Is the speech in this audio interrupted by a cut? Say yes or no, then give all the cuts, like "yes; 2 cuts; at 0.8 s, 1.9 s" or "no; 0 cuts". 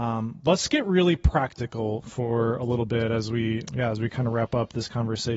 yes; 1 cut; at 3.7 s